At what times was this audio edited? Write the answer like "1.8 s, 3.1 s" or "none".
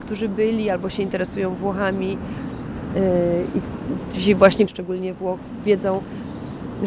4.7 s